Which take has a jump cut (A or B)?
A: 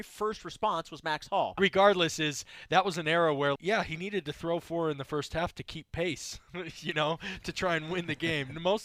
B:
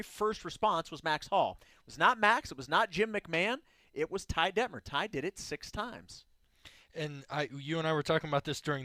A